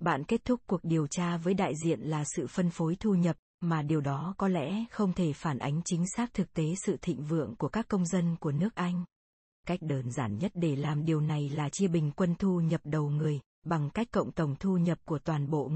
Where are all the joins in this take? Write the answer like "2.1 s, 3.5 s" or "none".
9.5 s